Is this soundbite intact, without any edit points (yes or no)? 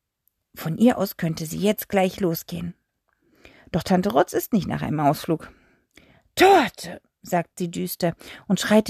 yes